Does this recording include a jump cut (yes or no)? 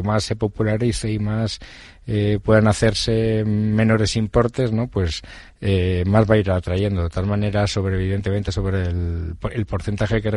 no